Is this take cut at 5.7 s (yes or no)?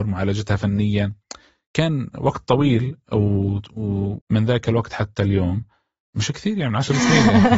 no